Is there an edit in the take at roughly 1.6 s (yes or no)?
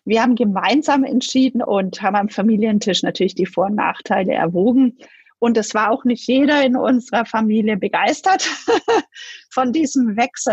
yes